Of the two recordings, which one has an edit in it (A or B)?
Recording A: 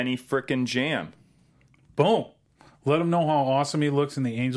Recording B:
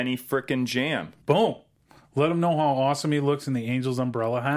B